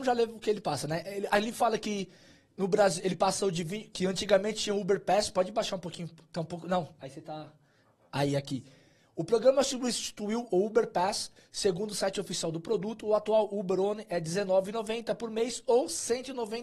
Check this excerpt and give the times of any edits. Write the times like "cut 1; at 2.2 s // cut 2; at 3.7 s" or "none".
cut 1; at 11.4 s